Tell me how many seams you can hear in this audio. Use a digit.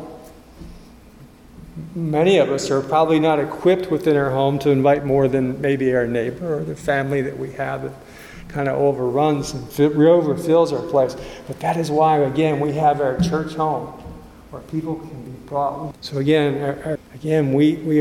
2